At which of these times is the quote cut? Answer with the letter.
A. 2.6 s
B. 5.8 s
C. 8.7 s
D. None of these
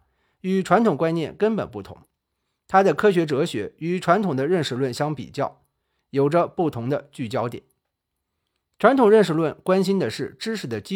D